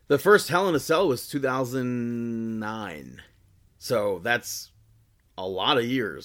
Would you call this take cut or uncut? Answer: cut